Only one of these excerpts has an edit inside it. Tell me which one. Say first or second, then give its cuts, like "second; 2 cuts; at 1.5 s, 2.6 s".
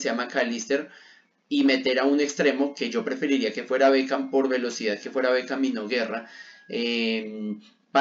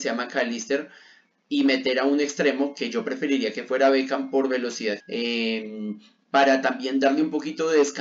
second; 1 cut; at 5.0 s